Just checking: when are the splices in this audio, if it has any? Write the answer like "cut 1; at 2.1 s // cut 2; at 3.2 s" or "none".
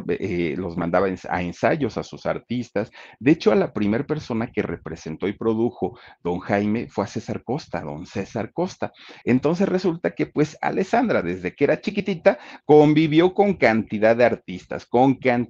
cut 1; at 9.2 s // cut 2; at 12.6 s